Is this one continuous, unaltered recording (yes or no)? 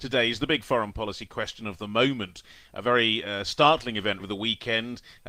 no